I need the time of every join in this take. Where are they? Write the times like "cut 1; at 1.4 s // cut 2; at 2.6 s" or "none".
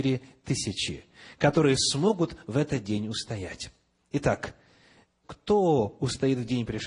cut 1; at 5.2 s